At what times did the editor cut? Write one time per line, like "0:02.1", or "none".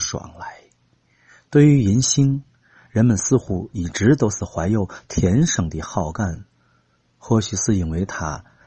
none